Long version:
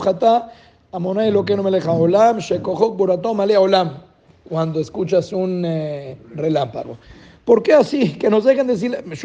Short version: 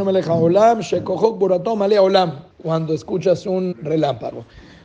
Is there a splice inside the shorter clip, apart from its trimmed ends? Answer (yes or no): yes